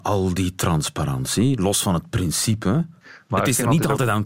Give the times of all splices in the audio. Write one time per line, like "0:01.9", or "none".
0:03.3